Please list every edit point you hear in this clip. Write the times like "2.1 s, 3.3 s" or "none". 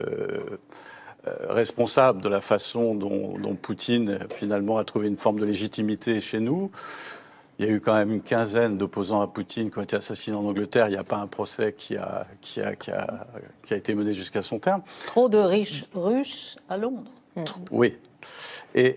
none